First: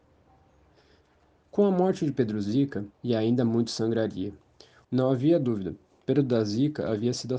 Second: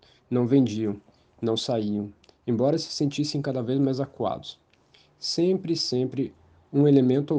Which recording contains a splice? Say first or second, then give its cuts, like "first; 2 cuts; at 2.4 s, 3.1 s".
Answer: first; 2 cuts; at 2.9 s, 4.8 s